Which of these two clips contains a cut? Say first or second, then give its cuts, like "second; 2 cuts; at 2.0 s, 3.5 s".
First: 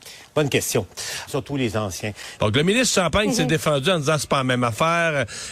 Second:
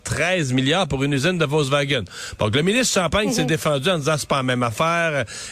first; 2 cuts; at 1.3 s, 2.4 s